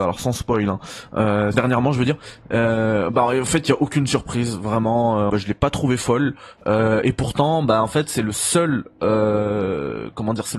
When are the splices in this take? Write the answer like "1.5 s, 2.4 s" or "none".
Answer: 1.5 s, 5.3 s